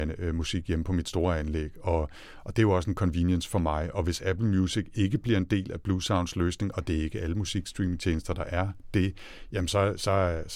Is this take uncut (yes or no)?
yes